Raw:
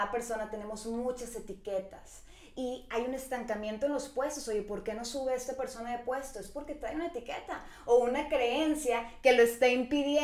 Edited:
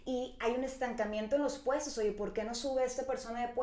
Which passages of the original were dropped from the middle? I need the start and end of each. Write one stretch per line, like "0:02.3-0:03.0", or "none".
none